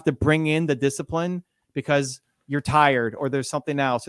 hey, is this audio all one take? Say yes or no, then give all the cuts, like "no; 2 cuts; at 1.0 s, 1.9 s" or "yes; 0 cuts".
yes; 0 cuts